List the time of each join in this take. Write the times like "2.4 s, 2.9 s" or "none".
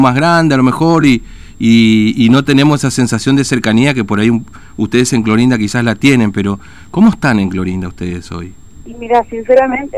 none

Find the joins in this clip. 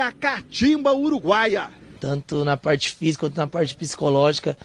2.0 s

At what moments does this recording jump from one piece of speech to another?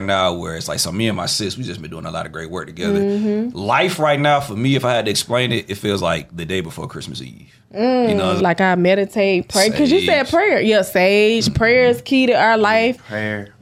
8.4 s

